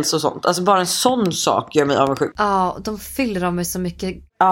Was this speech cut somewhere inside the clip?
yes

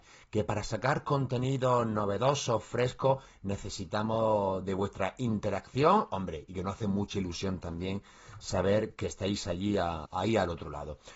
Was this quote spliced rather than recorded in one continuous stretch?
yes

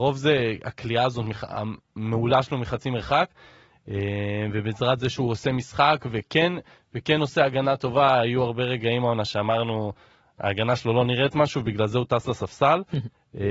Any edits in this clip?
no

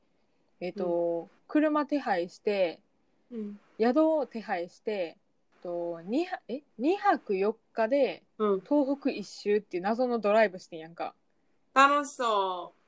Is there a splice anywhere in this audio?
yes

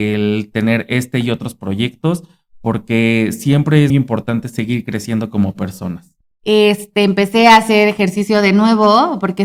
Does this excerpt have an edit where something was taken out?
yes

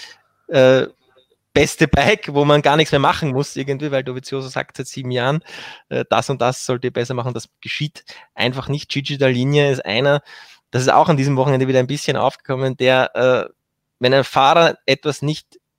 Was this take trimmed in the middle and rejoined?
no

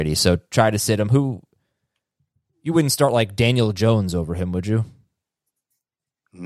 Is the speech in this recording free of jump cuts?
yes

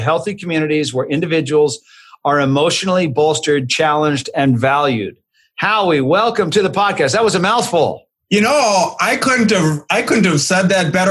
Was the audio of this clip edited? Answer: no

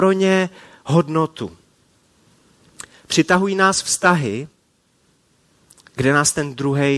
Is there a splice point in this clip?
no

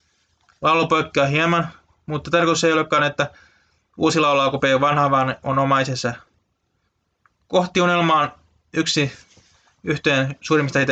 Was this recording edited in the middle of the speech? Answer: no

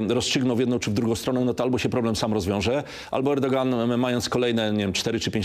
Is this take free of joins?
yes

